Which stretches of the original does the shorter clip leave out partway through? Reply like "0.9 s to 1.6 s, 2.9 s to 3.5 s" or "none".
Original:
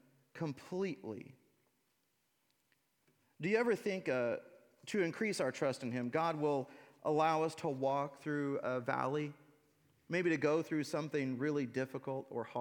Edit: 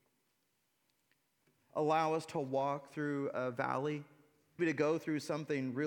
3.3 s to 7.0 s, 9.9 s to 10.2 s